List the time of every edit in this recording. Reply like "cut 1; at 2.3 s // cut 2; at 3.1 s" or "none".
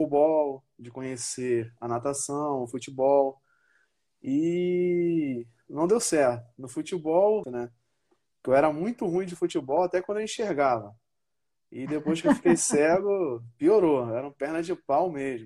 cut 1; at 7.4 s